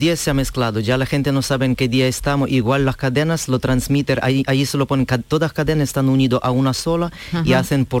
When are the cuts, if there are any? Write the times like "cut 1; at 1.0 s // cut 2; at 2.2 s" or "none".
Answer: none